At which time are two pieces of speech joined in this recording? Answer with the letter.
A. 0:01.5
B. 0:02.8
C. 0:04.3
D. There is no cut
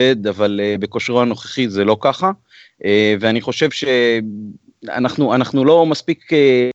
D